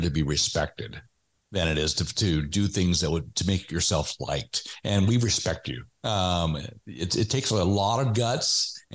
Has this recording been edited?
no; 0 cuts

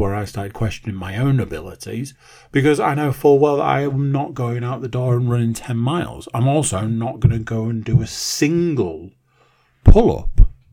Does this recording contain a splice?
no; 0 cuts

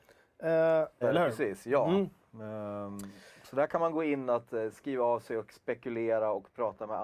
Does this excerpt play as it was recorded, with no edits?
no; 1 cut; at 1.0 s

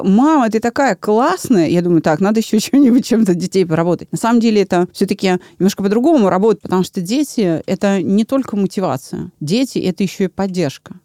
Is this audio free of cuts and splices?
no; 1 cut; at 6.6 s

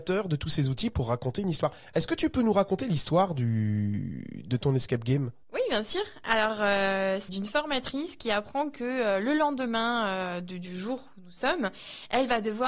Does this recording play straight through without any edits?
no; 2 cuts; at 5.4 s, 7.3 s

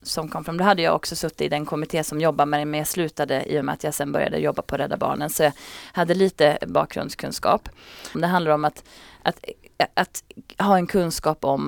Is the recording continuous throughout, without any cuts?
no; 1 cut; at 8.1 s

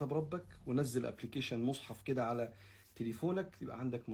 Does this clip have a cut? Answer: no; 0 cuts

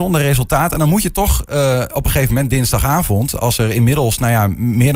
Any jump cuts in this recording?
no; 0 cuts

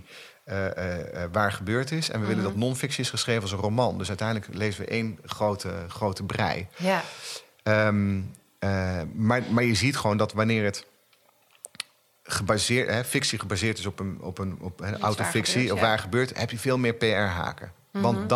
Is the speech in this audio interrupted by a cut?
no; 0 cuts

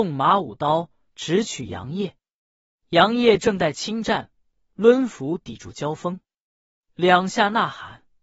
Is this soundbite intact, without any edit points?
no; 1 cut; at 4.6 s

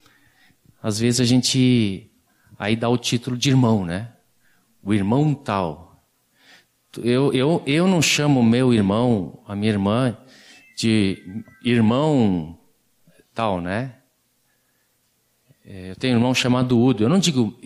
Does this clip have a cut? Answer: no; 0 cuts

